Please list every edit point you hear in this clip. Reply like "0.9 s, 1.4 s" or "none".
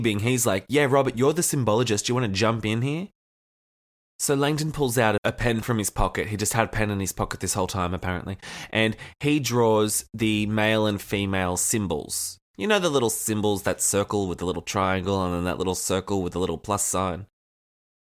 5.2 s